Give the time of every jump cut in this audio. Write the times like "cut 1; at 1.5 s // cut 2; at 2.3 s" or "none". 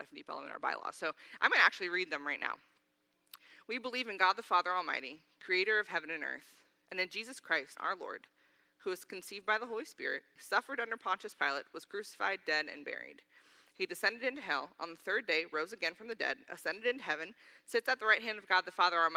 cut 1; at 7.7 s // cut 2; at 10.4 s